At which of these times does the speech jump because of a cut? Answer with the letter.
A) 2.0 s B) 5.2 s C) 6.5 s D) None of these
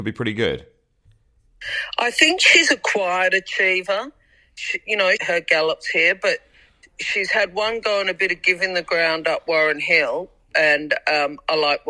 B